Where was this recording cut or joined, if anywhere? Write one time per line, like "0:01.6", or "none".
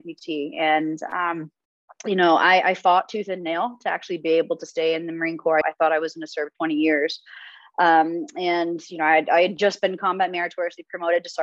0:05.6